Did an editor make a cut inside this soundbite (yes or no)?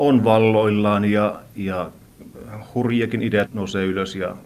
yes